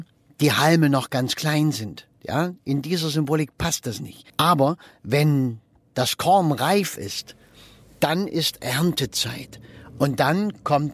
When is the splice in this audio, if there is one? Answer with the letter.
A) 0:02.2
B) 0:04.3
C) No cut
B